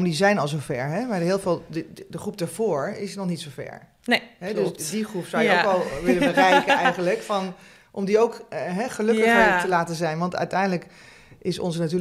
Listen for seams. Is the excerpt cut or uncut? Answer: uncut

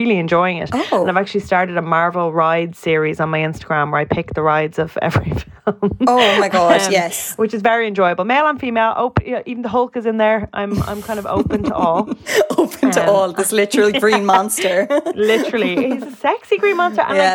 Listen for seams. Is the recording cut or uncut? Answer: uncut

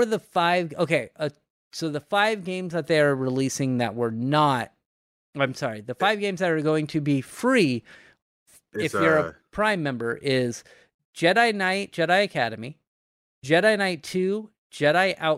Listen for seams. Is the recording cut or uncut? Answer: uncut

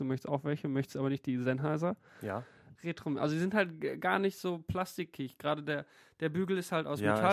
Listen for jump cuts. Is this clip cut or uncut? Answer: cut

